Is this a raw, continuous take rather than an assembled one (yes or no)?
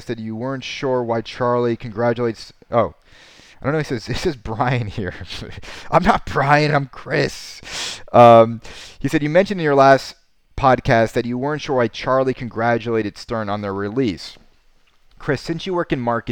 yes